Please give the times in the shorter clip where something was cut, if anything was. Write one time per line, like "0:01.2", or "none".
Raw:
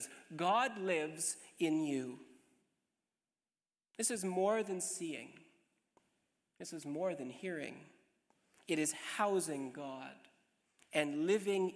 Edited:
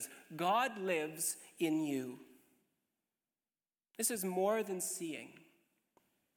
none